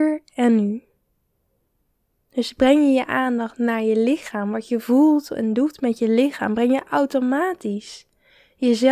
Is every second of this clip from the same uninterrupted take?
yes; 0 cuts

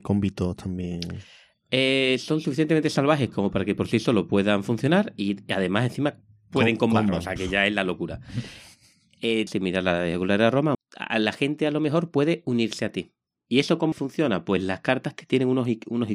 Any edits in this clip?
yes; 3 cuts; at 9.5 s, 10.7 s, 13.9 s

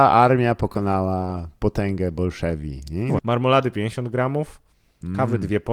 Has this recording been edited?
yes; 1 cut; at 3.2 s

